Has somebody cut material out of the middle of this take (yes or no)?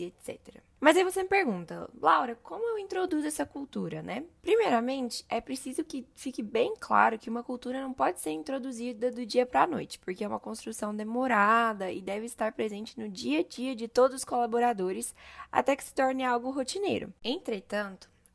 no